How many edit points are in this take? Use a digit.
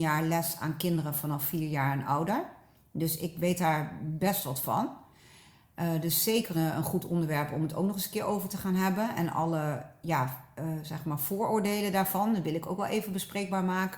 1